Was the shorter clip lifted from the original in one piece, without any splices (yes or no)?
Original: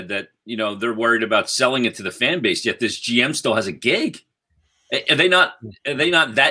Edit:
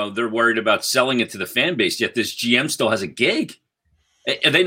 yes